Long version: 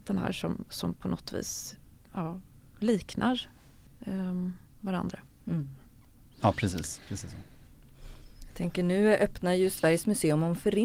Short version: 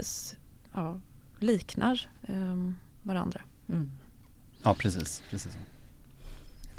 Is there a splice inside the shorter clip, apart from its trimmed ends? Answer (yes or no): yes